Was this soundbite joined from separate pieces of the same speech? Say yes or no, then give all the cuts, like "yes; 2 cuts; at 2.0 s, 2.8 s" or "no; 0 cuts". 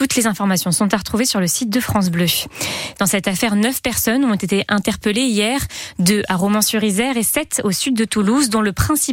yes; 1 cut; at 2.9 s